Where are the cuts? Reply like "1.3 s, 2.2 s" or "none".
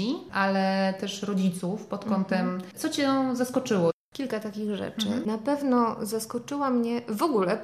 2.7 s